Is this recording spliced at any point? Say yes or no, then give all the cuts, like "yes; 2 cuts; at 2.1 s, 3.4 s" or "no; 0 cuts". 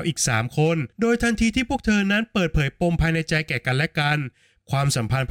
yes; 1 cut; at 0.9 s